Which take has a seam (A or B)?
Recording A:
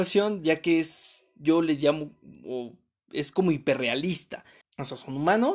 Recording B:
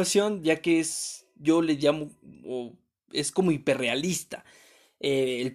A